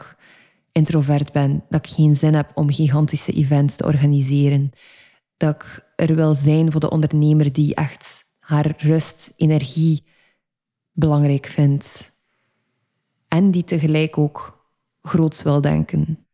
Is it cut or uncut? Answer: uncut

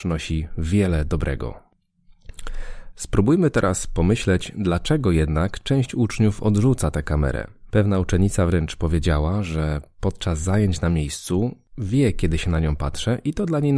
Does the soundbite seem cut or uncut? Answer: cut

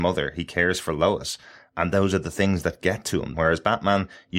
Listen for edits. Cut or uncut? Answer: cut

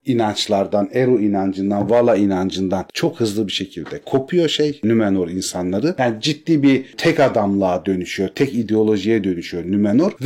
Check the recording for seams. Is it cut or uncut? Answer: cut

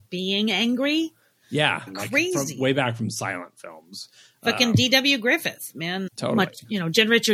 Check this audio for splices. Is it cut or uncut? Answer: cut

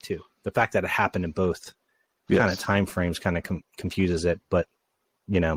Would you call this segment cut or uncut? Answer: uncut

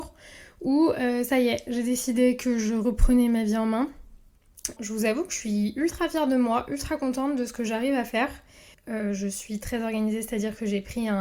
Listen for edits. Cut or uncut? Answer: cut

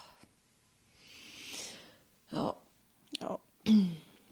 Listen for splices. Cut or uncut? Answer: uncut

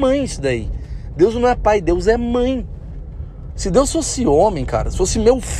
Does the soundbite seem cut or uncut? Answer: cut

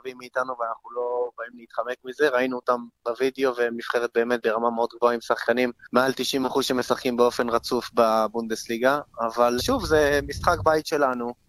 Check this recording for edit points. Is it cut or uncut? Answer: cut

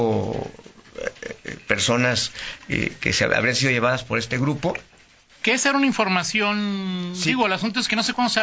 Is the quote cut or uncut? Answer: uncut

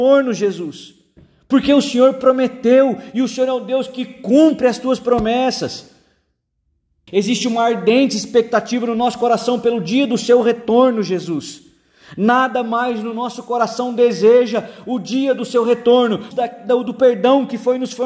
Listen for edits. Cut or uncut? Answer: cut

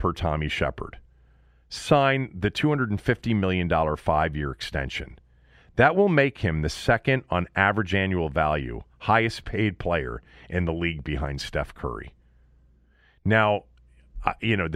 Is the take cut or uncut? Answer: uncut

